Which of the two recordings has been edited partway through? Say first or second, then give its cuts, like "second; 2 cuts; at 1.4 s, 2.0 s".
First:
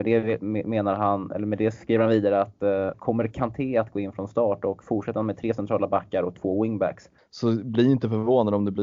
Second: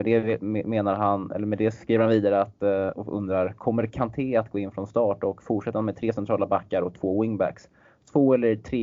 first; 2 cuts; at 2.9 s, 7.2 s